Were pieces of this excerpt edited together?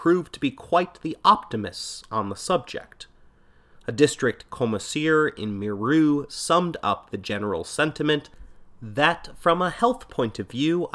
no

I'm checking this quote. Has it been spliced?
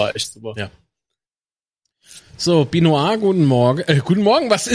no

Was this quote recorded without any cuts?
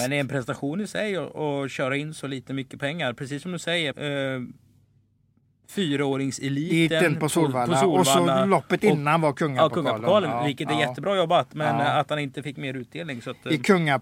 no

